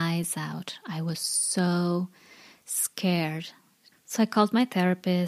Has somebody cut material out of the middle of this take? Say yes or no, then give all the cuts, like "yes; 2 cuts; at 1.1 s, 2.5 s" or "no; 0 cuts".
yes; 1 cut; at 3.9 s